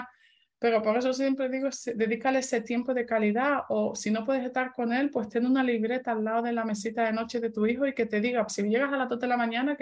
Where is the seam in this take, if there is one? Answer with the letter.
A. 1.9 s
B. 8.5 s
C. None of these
B